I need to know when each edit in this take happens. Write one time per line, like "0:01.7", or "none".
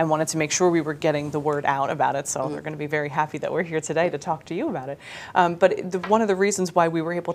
none